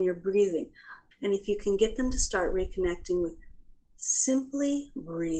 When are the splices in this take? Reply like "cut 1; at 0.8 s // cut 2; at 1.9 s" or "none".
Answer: cut 1; at 1.1 s